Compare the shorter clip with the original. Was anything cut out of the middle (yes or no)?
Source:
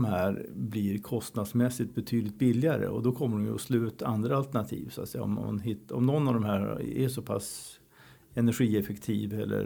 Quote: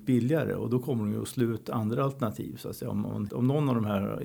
yes